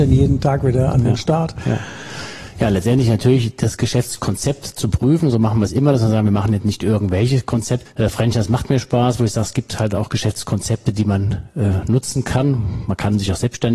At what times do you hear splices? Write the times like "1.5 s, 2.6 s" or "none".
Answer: 7.9 s